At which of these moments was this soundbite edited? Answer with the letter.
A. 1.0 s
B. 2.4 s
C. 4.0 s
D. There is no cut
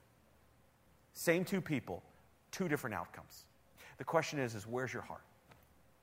D